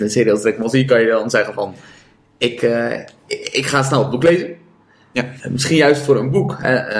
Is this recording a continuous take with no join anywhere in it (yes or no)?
no